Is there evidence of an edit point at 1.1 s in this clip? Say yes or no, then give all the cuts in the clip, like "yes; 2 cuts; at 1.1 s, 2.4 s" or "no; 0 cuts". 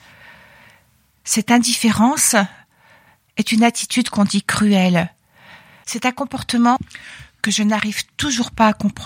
no; 1 cut; at 5.8 s